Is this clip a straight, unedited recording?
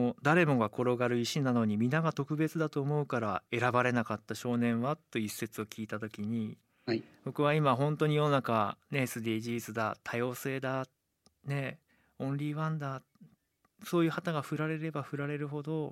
yes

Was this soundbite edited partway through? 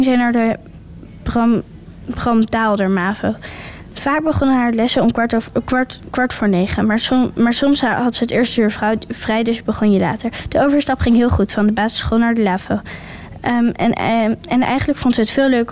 no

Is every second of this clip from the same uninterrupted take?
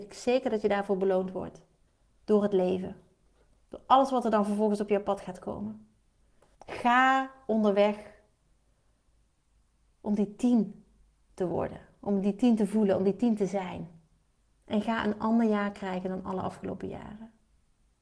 no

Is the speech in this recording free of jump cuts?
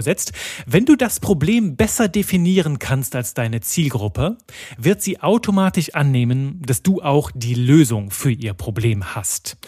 yes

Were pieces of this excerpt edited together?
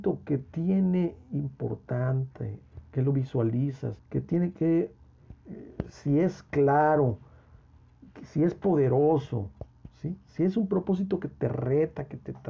yes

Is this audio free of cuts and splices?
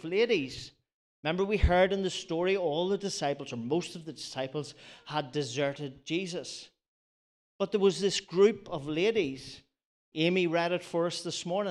yes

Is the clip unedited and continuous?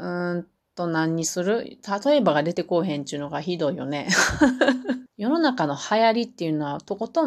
no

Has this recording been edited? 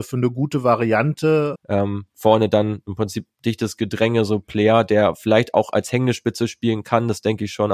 yes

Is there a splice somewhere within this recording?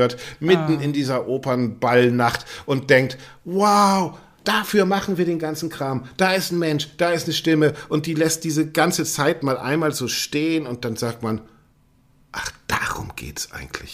yes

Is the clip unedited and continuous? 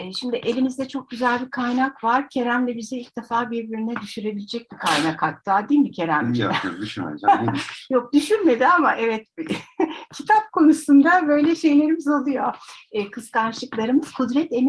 yes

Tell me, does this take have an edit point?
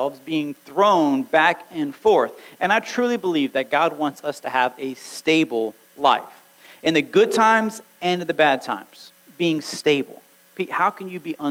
no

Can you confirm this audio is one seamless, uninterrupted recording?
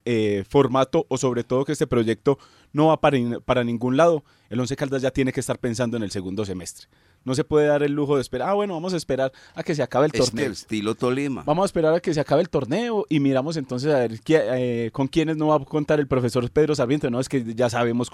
no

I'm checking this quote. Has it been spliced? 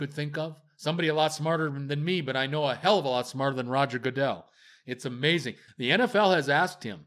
yes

